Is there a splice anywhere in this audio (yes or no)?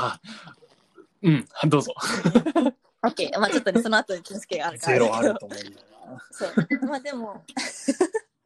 yes